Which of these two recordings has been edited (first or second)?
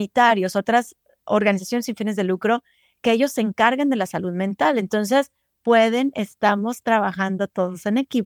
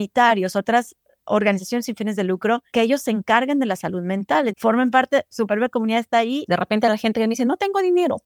second